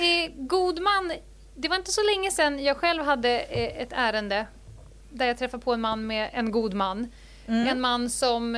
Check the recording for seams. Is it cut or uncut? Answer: uncut